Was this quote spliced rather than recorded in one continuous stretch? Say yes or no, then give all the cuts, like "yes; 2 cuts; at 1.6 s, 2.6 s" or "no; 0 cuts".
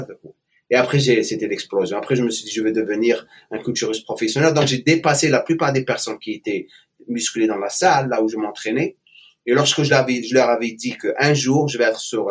no; 0 cuts